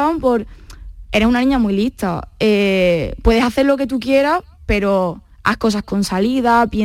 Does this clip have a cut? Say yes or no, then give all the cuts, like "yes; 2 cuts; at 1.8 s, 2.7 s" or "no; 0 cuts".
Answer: yes; 1 cut; at 5.3 s